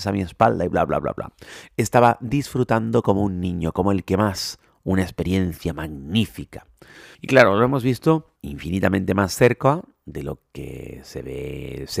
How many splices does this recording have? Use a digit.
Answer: 2